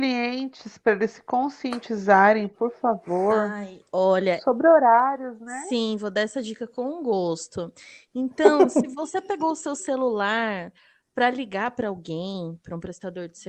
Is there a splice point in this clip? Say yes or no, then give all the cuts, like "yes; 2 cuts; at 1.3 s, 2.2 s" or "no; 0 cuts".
no; 0 cuts